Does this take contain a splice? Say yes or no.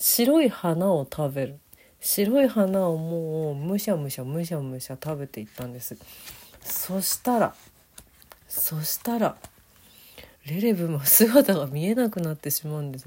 yes